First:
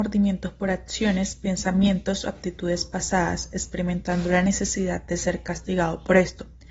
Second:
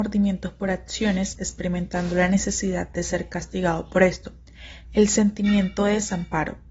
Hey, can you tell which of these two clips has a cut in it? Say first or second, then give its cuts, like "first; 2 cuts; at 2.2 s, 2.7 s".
second; 2 cuts; at 1.3 s, 4.8 s